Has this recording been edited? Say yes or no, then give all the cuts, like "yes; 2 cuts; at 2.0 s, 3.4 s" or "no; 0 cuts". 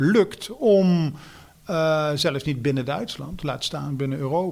no; 0 cuts